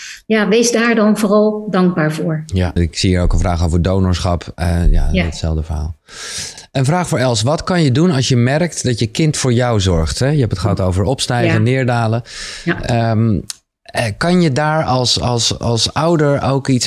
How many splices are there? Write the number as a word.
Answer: one